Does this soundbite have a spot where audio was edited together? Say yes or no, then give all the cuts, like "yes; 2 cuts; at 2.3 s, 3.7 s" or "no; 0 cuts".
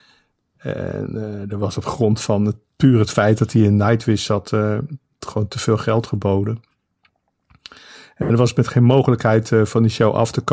no; 0 cuts